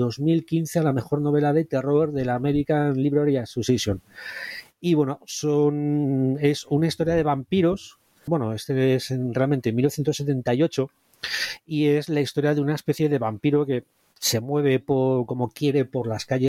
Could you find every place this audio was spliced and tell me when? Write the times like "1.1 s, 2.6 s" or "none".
8.3 s